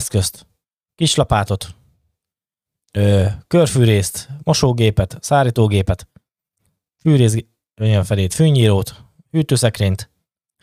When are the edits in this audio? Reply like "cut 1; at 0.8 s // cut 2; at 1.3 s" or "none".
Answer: none